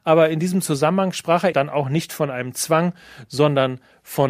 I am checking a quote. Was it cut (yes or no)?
yes